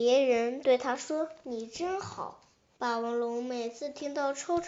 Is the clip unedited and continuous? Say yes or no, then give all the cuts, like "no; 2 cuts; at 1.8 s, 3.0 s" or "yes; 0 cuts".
no; 1 cut; at 2.8 s